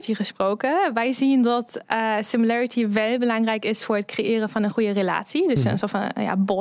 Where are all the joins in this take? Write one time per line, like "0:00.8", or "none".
none